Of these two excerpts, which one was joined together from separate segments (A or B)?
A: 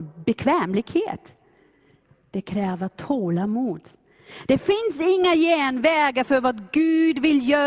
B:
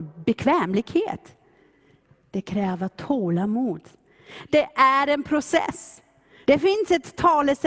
B